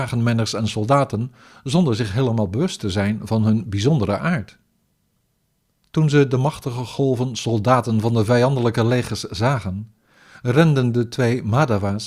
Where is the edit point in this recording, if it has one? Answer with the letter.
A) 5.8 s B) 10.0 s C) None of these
A